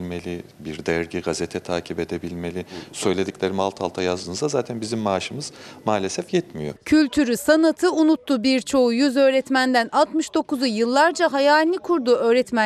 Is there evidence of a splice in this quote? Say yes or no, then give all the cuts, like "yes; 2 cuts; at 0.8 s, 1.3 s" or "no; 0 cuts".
no; 0 cuts